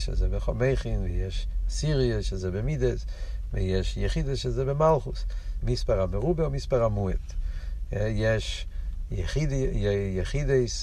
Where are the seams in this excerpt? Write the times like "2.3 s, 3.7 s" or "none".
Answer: 5.6 s